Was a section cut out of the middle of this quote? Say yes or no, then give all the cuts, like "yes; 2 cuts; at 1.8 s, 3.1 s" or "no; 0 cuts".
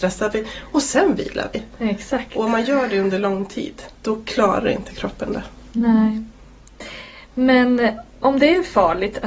no; 0 cuts